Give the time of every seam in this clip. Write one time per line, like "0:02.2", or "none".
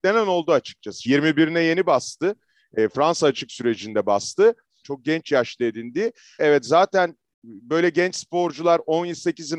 0:01.1
0:04.8
0:06.4